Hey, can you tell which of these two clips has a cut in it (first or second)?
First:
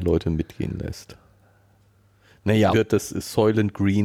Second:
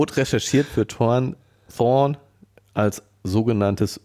first